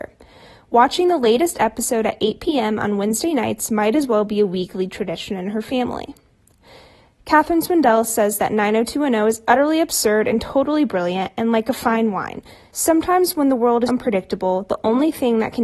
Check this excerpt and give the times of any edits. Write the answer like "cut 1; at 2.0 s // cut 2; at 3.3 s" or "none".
cut 1; at 12.7 s // cut 2; at 13.9 s